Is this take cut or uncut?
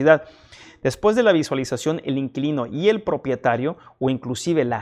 uncut